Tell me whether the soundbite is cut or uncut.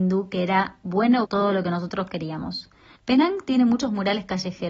cut